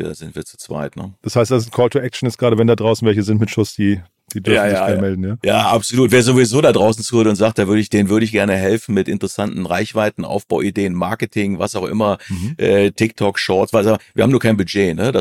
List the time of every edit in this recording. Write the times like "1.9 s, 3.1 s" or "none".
none